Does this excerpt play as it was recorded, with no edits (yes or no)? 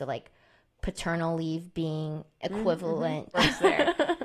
no